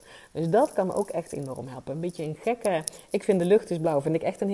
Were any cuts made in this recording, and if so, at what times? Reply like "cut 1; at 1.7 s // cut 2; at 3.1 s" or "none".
none